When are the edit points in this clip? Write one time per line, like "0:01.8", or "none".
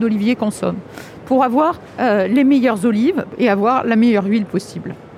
none